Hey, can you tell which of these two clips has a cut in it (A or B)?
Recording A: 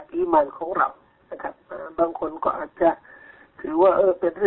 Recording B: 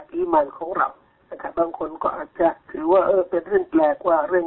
B